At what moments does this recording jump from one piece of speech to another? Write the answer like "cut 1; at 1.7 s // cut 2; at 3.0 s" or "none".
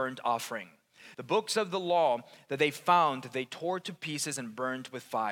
cut 1; at 1.1 s